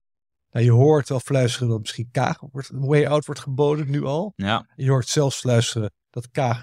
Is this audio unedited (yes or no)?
yes